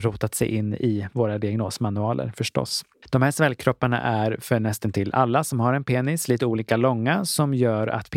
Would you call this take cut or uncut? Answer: cut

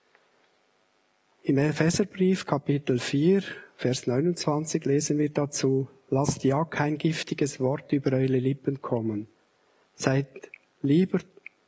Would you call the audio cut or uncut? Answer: uncut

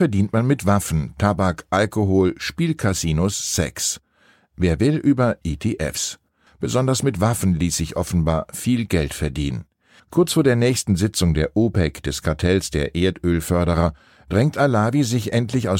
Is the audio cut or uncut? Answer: cut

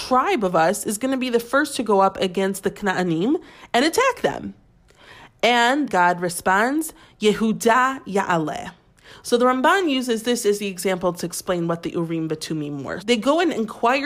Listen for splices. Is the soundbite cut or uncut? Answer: cut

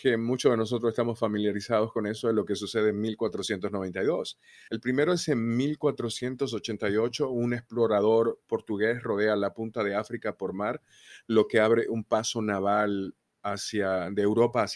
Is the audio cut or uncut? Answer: cut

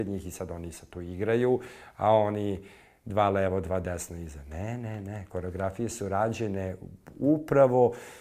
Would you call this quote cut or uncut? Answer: uncut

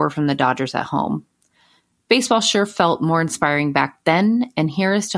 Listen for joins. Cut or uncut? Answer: uncut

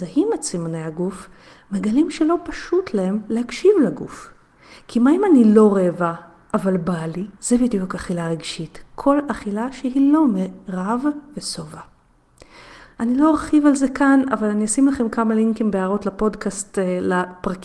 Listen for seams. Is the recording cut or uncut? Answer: cut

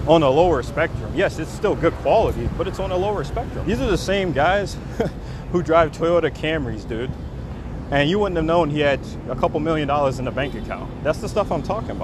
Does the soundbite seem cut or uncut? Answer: cut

